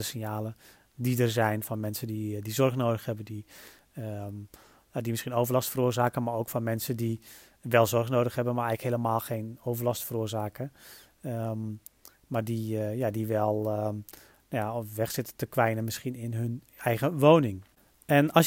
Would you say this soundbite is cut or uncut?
uncut